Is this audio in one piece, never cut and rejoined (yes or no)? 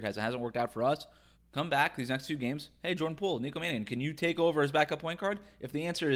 no